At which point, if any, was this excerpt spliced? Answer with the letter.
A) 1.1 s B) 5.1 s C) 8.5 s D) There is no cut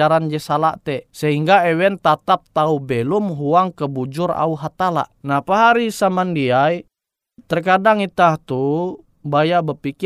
A